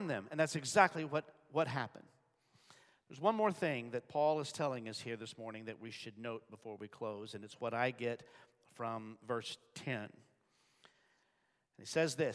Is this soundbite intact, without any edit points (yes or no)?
yes